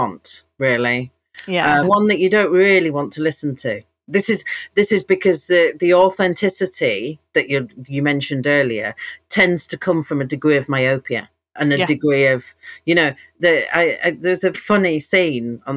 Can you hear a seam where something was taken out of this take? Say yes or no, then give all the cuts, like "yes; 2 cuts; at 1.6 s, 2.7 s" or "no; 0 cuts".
yes; 2 cuts; at 1.8 s, 14.5 s